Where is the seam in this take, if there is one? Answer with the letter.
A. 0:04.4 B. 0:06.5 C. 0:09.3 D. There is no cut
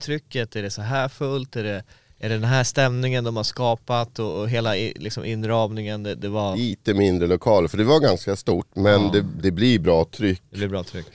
B